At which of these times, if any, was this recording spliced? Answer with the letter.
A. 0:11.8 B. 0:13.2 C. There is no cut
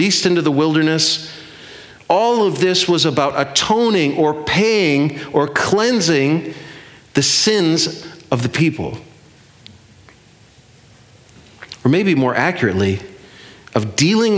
C